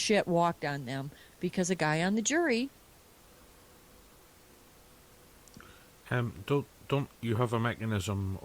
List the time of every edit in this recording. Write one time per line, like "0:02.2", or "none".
none

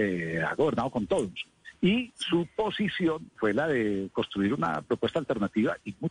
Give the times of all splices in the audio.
0:03.4

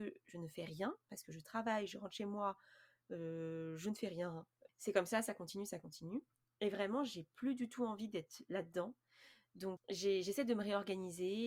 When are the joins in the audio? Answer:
0:04.7
0:09.8

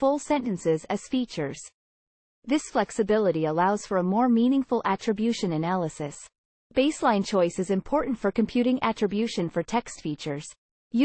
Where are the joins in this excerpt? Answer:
none

